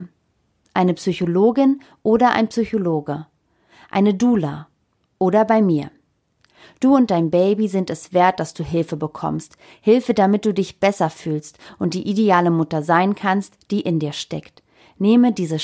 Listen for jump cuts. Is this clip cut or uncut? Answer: uncut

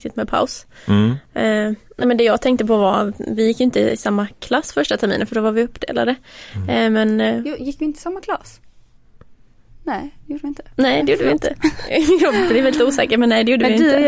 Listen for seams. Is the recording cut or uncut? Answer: uncut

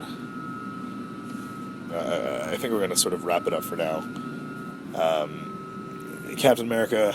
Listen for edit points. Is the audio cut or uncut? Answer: cut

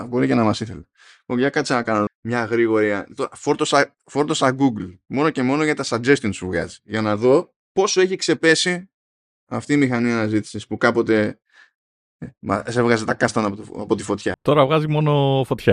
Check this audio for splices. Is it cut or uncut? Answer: cut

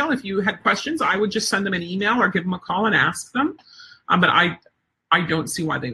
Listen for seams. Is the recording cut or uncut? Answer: uncut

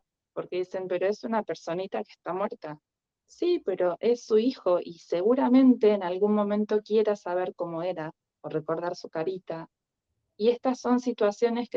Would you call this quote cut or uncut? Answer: uncut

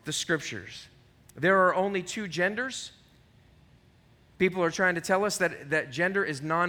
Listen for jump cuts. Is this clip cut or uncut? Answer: uncut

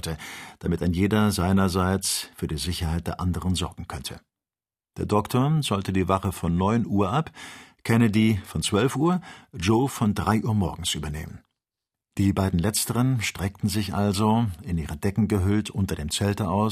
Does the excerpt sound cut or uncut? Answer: uncut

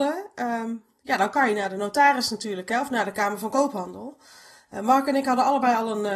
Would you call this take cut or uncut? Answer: uncut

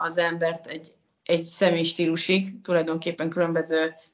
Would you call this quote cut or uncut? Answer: uncut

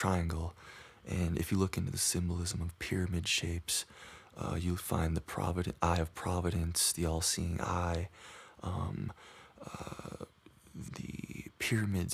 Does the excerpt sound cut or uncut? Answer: cut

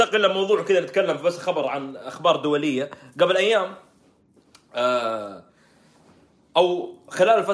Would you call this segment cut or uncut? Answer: uncut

